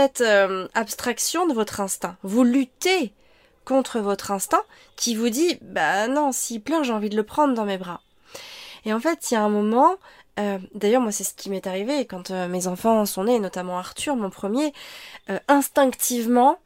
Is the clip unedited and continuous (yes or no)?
no